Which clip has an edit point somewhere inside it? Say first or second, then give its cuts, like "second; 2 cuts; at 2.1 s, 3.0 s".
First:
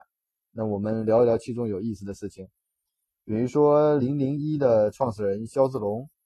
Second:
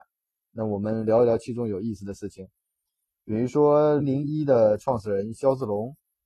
second; 1 cut; at 4.0 s